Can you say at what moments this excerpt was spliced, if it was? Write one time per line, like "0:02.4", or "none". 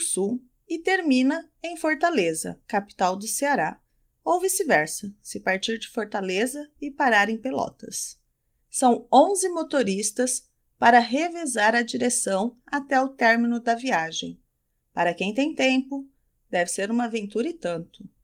0:08.6